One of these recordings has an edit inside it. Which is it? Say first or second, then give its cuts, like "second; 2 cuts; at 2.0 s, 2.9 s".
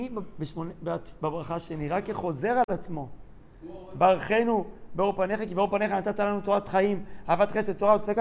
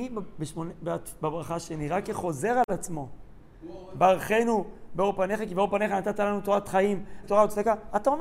second; 1 cut; at 7.2 s